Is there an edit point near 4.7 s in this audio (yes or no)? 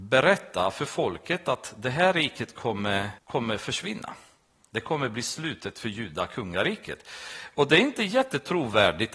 no